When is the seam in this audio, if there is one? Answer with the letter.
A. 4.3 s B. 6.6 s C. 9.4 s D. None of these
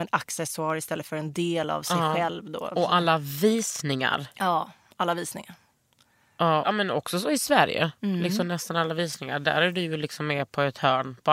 B